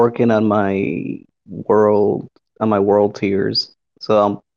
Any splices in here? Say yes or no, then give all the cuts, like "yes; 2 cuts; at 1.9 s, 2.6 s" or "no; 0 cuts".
no; 0 cuts